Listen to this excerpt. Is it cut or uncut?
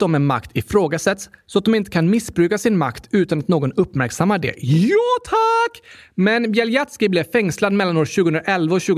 uncut